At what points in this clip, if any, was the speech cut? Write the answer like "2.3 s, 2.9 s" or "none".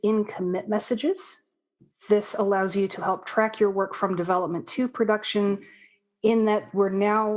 none